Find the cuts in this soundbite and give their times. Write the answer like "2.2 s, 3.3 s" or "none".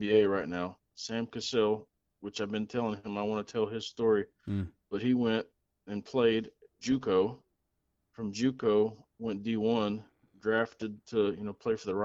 none